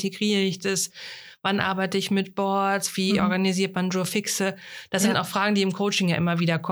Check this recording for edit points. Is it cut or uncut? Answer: uncut